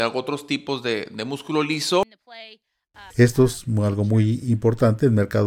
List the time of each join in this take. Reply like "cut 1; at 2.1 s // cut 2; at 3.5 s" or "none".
cut 1; at 3.1 s